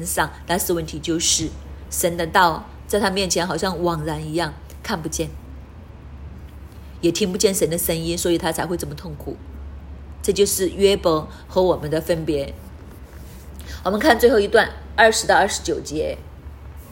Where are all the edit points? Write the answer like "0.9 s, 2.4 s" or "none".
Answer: none